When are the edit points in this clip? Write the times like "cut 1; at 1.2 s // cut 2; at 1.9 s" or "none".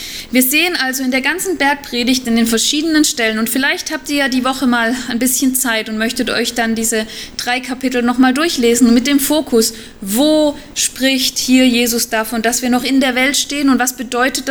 none